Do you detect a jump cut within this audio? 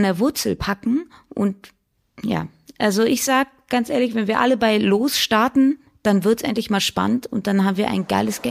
no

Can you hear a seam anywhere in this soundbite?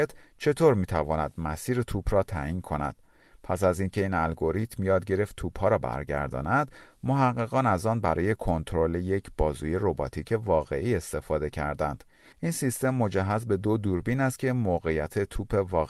no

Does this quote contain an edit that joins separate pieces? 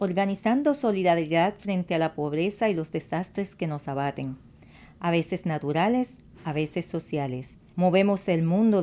yes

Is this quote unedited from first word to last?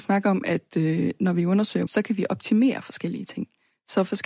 no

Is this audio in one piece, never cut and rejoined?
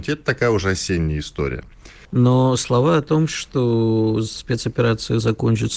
no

